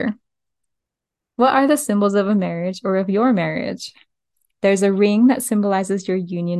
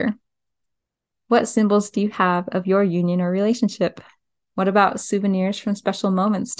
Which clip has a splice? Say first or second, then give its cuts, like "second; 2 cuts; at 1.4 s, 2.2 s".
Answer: second; 2 cuts; at 1.1 s, 4.4 s